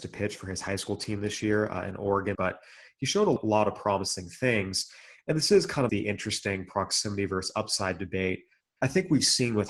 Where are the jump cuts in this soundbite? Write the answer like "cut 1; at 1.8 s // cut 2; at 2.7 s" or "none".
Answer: cut 1; at 2.3 s // cut 2; at 5.9 s